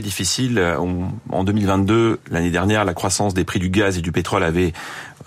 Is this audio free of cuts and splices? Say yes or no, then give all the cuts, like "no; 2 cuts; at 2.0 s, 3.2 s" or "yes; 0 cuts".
yes; 0 cuts